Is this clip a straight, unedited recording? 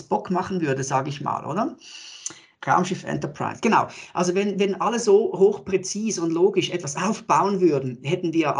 yes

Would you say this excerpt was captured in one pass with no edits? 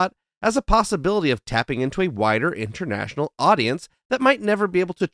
yes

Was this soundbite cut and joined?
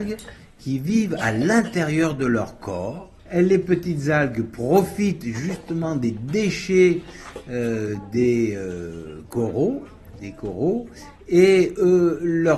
yes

